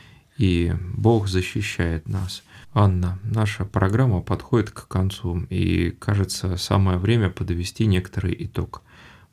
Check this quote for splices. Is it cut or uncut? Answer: cut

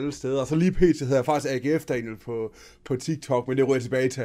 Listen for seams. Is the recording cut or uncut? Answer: uncut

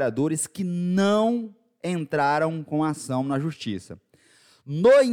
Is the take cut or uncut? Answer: uncut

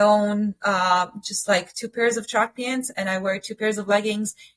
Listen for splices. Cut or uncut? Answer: uncut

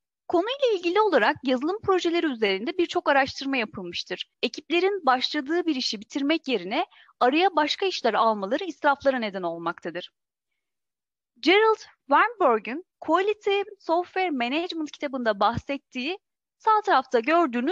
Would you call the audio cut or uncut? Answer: cut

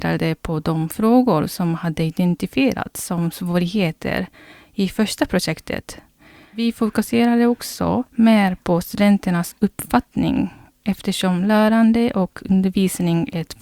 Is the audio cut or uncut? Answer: cut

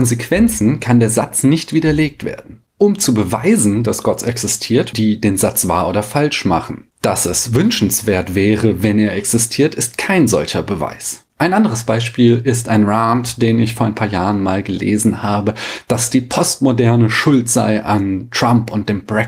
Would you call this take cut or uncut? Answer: cut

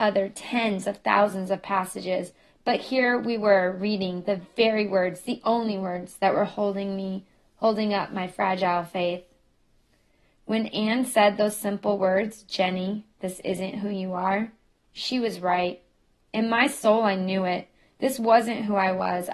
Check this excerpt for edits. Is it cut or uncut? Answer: uncut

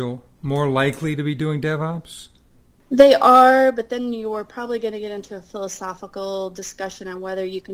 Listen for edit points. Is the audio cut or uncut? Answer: uncut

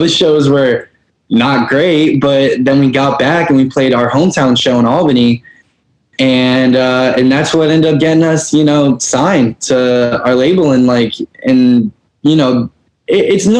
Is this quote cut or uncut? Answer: uncut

